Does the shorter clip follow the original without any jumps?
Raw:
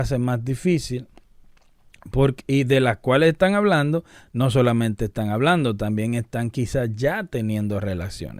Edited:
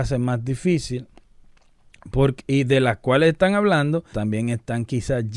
no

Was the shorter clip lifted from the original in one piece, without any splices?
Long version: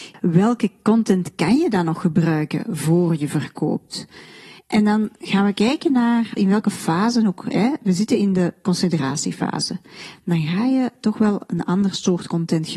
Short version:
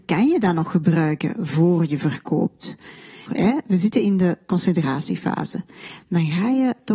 no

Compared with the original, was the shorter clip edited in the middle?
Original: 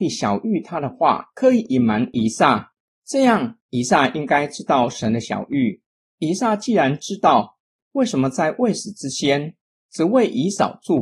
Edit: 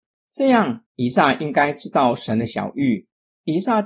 no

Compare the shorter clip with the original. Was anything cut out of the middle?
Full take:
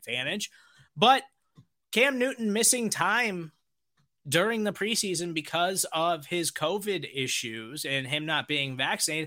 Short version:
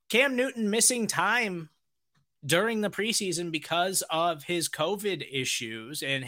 no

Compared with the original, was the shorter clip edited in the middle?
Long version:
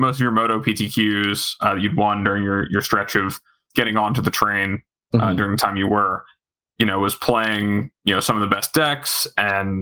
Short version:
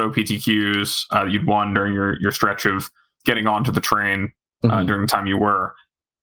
no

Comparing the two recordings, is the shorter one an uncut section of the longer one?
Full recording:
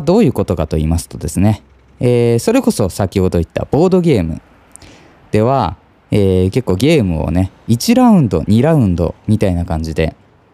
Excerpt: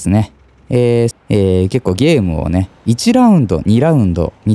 no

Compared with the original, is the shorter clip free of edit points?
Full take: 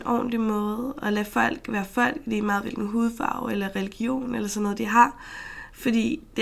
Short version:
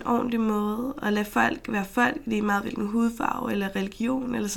yes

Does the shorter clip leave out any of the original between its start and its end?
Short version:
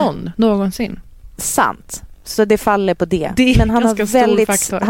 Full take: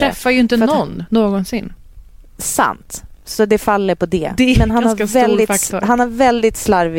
yes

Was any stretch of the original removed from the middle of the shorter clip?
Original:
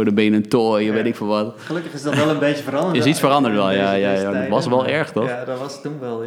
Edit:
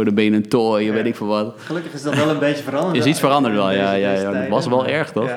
no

